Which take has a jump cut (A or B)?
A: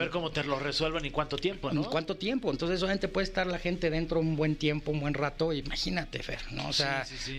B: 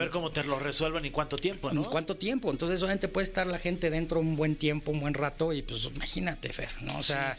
A